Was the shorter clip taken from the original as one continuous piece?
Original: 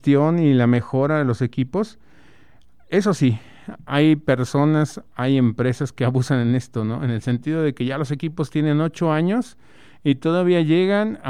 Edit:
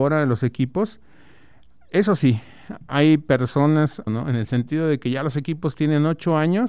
no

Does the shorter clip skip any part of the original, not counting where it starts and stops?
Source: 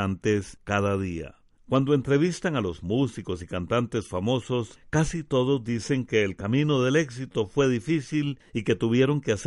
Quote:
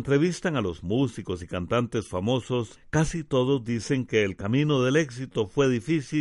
no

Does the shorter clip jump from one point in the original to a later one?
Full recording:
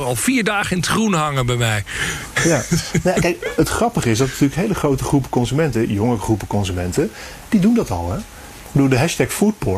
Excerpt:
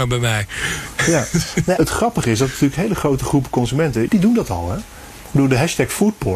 yes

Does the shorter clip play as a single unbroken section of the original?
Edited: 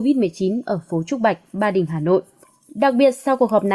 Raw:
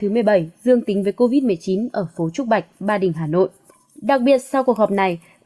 yes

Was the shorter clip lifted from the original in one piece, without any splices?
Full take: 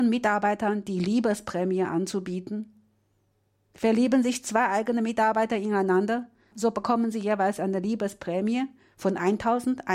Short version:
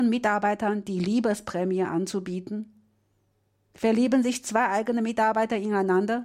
yes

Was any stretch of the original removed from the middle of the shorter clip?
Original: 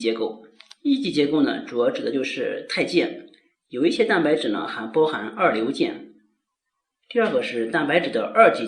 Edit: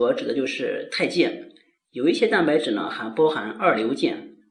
no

